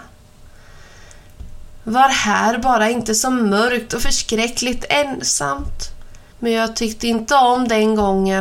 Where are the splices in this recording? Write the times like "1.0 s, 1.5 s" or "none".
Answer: 6.3 s